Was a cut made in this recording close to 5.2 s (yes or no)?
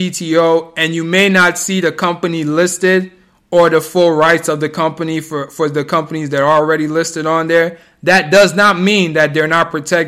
no